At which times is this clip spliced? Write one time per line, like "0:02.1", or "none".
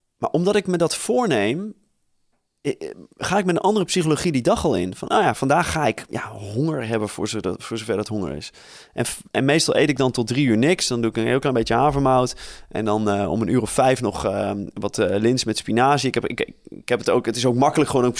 none